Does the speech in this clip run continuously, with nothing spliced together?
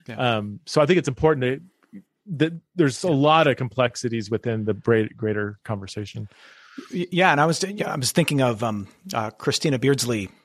yes; 0 cuts

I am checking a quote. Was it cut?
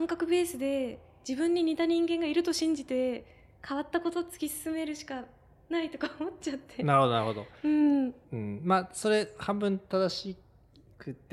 yes; 1 cut; at 8.2 s

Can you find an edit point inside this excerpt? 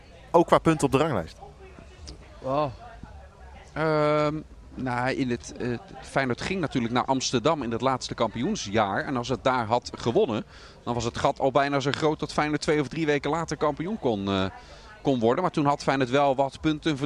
no; 0 cuts

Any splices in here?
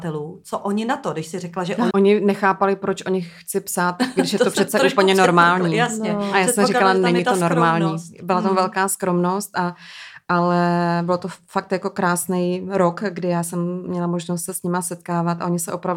yes; 1 cut; at 1.9 s

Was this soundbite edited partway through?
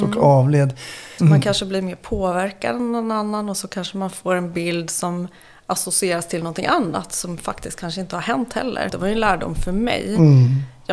yes; 2 cuts; at 1.2 s, 8.9 s

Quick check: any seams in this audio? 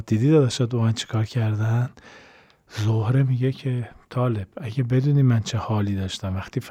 no; 0 cuts

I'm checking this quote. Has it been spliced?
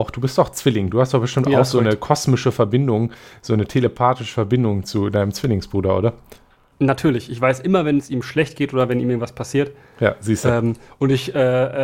no; 0 cuts

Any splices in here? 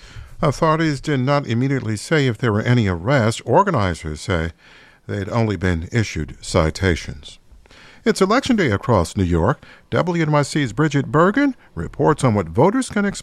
no; 0 cuts

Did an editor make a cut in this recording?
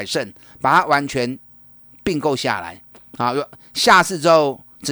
no; 0 cuts

